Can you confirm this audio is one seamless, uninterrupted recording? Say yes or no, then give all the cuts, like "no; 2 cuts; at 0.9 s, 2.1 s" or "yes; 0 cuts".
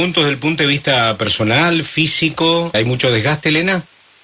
no; 1 cut; at 2.7 s